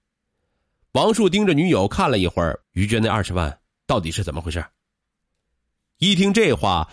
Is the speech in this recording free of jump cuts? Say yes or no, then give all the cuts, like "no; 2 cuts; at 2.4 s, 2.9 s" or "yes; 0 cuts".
no; 1 cut; at 2.6 s